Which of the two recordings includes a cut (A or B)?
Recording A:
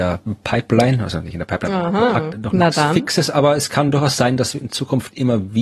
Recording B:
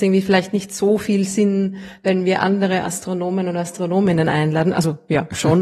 A